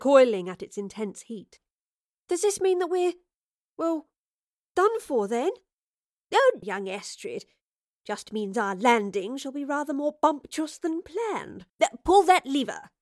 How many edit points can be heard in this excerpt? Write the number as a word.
two